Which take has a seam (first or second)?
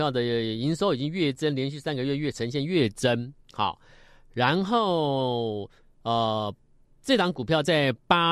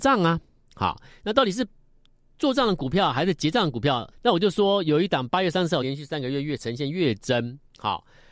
second